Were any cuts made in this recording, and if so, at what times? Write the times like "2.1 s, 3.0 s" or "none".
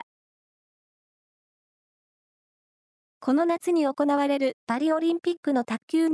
none